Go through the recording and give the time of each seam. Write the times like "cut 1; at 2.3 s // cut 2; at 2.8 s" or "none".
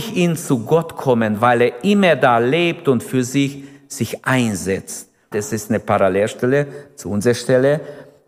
cut 1; at 5.3 s